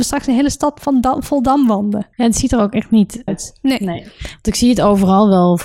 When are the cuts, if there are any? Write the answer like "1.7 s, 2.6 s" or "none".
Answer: 2.1 s, 3.3 s

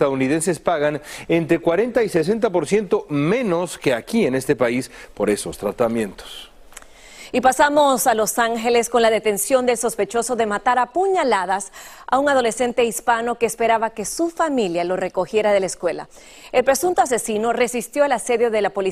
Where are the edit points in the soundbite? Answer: none

